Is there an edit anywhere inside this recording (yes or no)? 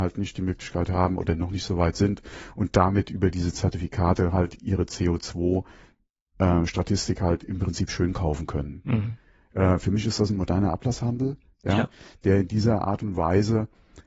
no